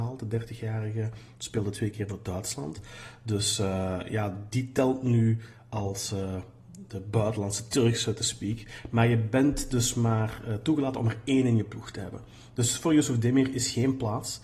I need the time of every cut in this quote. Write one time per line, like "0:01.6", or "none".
none